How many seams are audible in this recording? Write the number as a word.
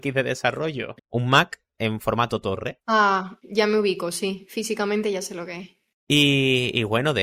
two